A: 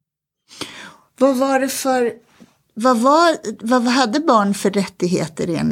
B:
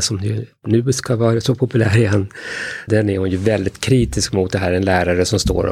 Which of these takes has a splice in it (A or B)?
B